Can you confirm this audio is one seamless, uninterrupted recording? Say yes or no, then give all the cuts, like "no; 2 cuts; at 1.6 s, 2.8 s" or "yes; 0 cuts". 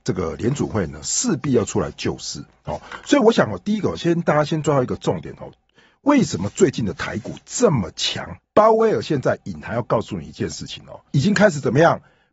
no; 2 cuts; at 8.4 s, 11.1 s